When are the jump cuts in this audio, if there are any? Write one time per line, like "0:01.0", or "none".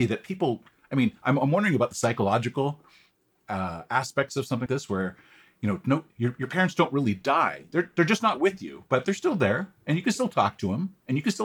0:04.7